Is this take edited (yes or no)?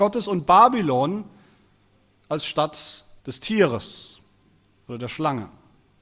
yes